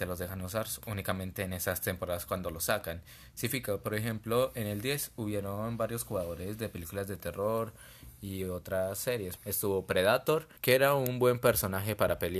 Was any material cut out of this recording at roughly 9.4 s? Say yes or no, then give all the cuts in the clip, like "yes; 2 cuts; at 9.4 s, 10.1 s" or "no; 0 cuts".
yes; 2 cuts; at 9.4 s, 10.6 s